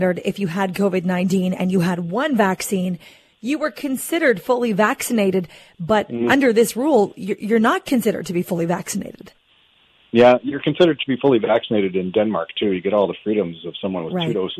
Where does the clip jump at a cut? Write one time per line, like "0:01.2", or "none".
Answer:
none